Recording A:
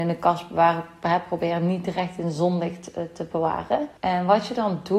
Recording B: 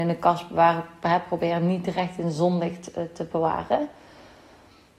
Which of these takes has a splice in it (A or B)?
A